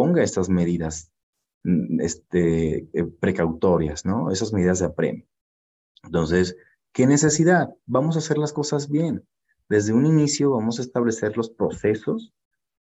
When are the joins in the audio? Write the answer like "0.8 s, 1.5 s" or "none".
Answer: none